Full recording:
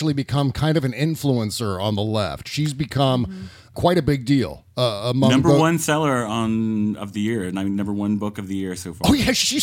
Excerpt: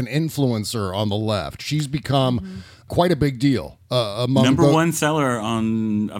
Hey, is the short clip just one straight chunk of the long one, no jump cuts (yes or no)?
yes